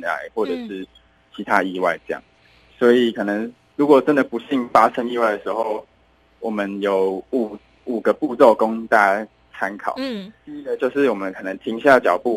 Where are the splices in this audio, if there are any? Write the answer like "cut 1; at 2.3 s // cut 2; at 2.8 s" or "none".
none